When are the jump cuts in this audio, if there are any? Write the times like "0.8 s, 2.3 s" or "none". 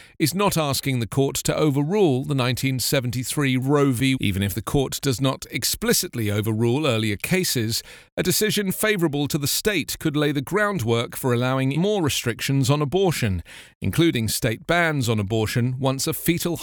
4.1 s, 11.7 s